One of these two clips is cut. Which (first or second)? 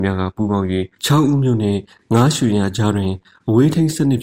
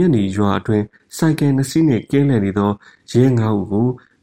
first